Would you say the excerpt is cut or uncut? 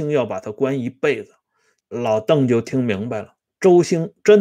cut